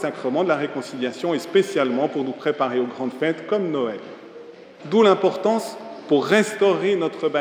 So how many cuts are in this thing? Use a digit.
1